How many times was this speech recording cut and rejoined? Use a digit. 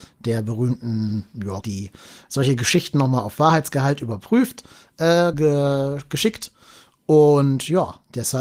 2